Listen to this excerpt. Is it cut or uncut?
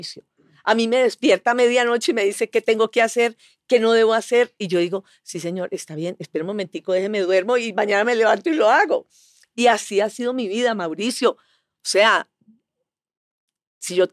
uncut